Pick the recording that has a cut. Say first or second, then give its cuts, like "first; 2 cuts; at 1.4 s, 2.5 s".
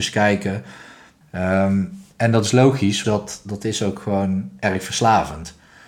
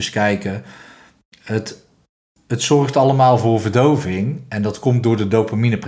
first; 2 cuts; at 1.2 s, 3.0 s